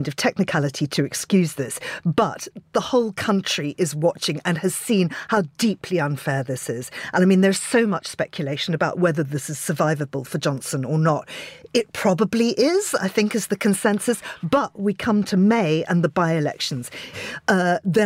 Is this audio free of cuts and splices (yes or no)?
no